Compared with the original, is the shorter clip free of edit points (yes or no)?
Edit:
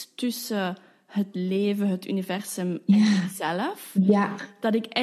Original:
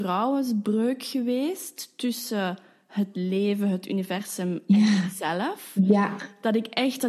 yes